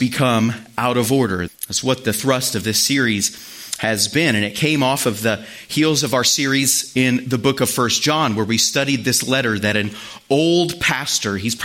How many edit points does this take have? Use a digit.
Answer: 1